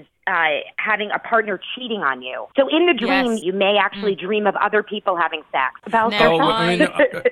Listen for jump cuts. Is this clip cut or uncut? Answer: cut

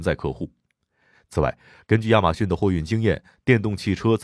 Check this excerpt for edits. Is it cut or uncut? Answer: uncut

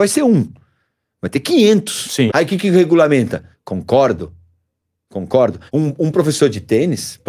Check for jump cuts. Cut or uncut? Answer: cut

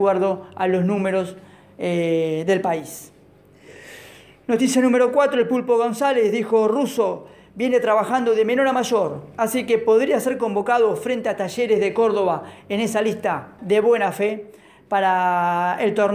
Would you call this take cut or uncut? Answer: cut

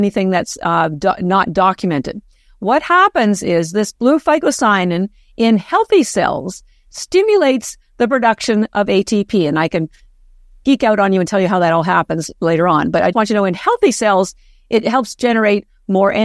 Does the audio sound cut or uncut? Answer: cut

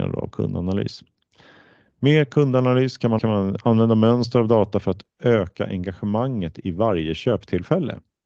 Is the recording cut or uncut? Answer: cut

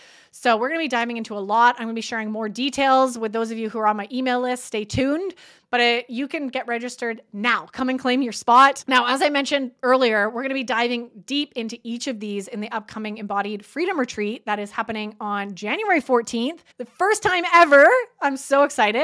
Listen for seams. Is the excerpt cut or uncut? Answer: cut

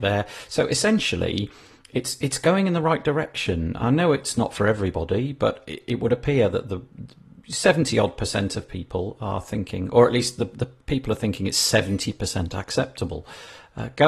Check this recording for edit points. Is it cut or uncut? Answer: uncut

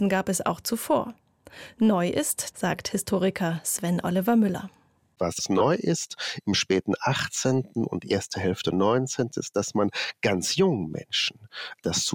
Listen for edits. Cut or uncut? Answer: cut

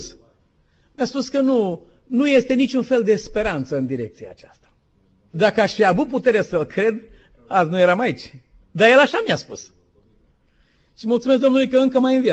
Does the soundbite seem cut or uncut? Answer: cut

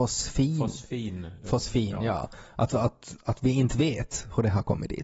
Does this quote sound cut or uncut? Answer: uncut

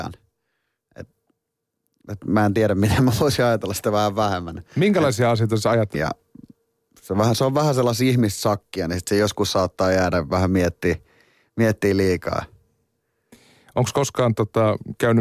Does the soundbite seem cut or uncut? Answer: cut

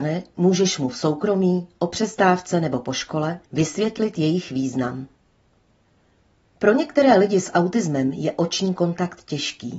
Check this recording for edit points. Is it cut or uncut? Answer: cut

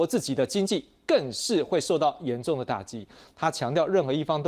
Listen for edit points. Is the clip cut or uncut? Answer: cut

